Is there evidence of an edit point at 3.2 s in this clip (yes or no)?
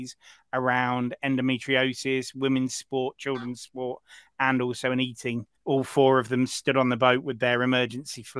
no